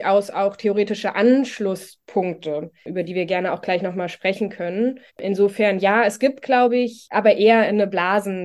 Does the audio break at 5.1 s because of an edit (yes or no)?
yes